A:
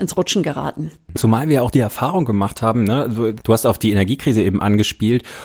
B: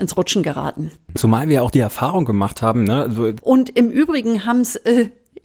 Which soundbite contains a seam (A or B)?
B